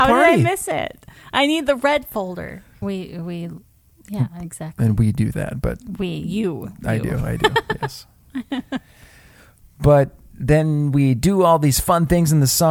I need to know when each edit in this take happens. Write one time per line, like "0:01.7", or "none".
0:02.8